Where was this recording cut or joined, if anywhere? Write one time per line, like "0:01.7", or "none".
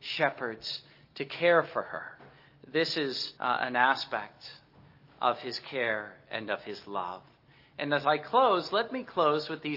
0:03.4